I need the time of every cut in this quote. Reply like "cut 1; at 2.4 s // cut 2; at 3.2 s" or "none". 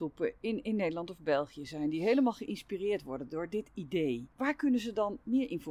cut 1; at 4.3 s